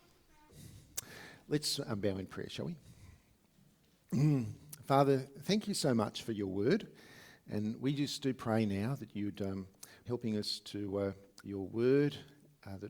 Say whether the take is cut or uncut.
cut